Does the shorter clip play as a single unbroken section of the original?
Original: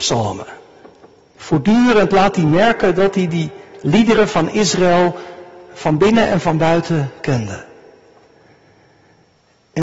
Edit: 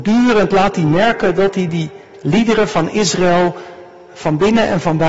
yes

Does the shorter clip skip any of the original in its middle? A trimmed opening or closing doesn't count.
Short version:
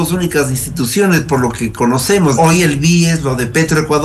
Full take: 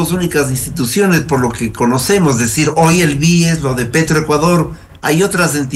yes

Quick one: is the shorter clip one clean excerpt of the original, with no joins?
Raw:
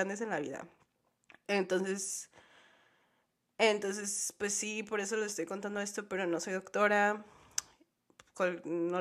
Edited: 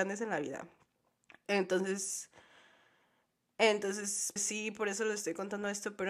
no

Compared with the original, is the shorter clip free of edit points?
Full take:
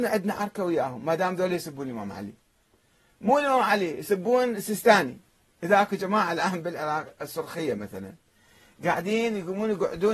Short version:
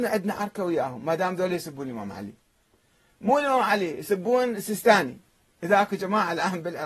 yes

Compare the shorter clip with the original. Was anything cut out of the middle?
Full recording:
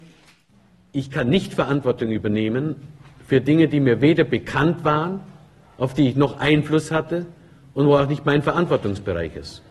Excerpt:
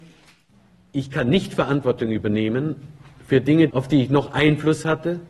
yes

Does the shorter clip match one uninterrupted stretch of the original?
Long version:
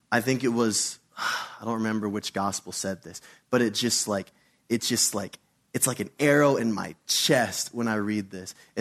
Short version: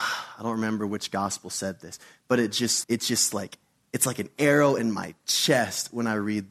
no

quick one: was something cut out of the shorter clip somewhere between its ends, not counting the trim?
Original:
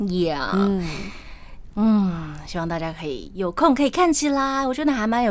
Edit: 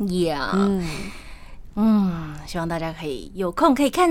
no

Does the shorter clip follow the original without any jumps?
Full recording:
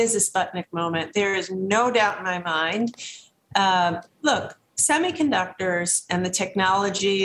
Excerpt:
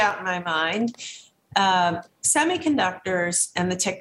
no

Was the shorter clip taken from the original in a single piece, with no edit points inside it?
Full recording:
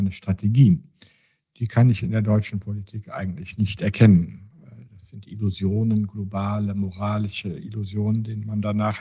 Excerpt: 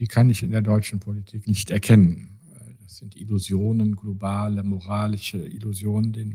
no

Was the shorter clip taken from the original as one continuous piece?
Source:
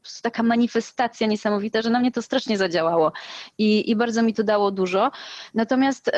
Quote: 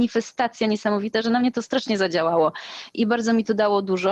no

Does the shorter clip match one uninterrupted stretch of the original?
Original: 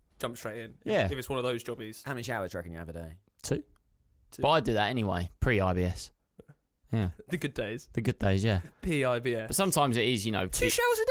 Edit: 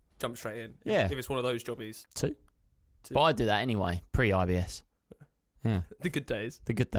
no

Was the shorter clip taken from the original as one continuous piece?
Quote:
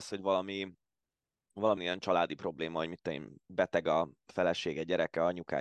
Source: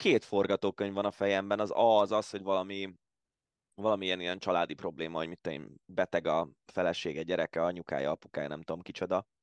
no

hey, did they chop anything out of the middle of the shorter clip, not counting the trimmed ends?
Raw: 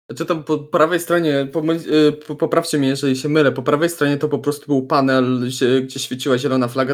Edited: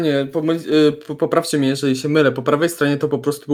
no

